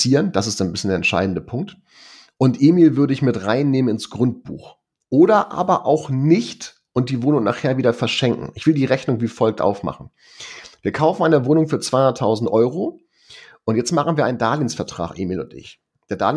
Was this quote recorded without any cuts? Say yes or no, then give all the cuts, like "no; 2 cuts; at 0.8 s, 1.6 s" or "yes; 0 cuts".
yes; 0 cuts